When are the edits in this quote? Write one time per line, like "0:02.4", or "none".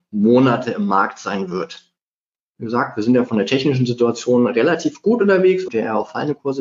0:02.4
0:05.7